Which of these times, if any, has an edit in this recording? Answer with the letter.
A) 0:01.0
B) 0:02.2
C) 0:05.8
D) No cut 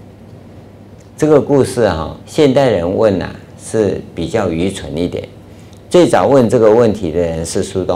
B